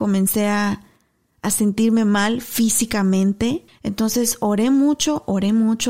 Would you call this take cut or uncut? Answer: cut